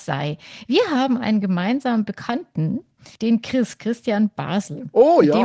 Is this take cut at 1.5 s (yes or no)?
no